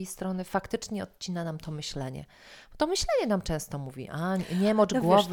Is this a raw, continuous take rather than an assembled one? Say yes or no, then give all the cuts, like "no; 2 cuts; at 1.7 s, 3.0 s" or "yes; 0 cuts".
yes; 0 cuts